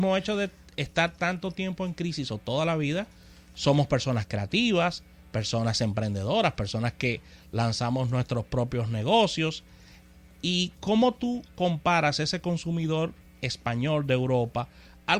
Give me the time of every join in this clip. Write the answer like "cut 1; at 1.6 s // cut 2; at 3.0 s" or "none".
none